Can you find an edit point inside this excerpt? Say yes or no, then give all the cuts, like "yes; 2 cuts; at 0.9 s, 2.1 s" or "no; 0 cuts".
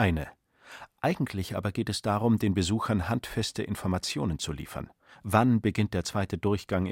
no; 0 cuts